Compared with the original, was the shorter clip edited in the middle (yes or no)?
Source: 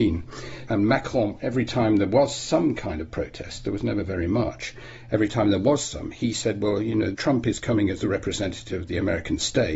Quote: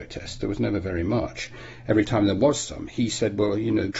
no